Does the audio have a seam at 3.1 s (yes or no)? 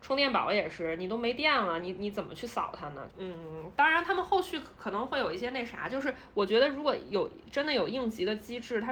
yes